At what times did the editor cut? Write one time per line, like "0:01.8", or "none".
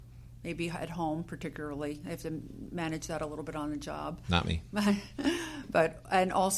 none